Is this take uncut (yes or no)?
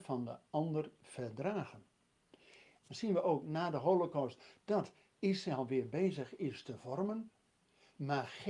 no